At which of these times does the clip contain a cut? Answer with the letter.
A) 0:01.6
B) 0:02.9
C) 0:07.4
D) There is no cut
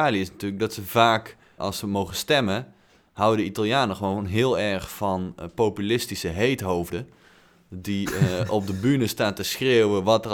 A